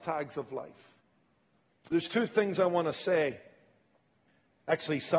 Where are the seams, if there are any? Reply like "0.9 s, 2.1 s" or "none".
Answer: 1.9 s